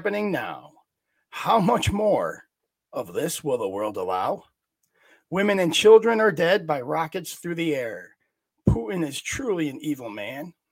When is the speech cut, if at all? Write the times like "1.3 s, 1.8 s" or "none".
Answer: none